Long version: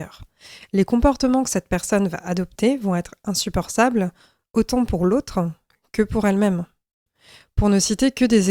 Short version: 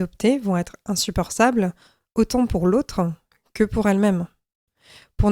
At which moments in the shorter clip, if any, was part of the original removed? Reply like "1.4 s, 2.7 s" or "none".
none